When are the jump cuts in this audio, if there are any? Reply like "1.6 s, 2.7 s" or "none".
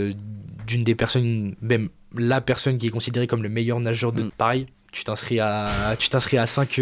4.3 s